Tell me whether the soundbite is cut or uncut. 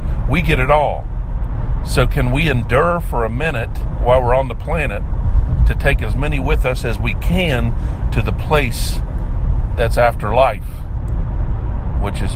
uncut